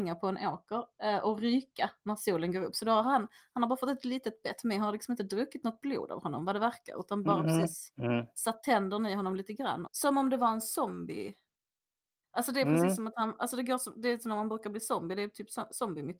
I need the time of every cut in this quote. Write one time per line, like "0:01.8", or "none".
0:09.9